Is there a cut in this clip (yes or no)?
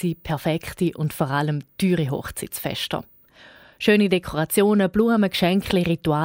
no